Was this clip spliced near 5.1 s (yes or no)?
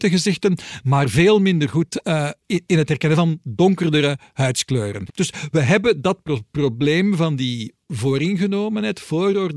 yes